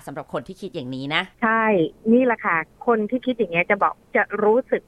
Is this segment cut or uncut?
cut